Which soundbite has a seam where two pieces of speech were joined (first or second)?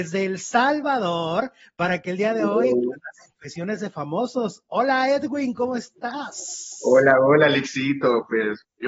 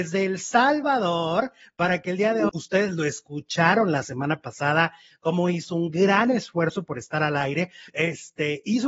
second